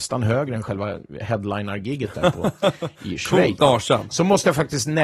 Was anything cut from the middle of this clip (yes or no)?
yes